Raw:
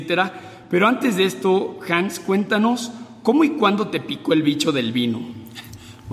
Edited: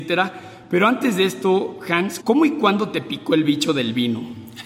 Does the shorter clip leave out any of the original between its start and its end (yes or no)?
yes